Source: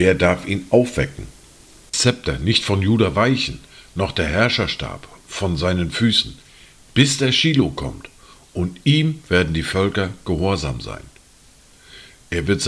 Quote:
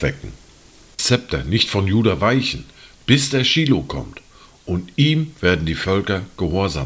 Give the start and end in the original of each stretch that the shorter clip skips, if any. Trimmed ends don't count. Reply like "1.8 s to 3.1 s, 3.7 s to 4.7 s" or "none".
3.9 s to 6.8 s